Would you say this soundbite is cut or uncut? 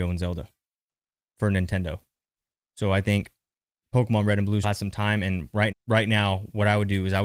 cut